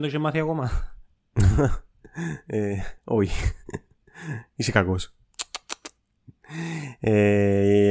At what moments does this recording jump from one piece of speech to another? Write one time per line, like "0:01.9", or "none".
0:03.0